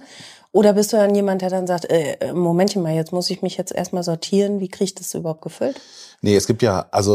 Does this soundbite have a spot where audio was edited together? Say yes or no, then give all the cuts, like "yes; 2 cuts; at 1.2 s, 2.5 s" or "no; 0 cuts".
no; 0 cuts